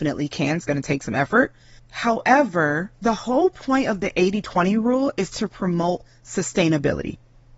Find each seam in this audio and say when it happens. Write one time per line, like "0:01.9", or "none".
0:01.8
0:02.9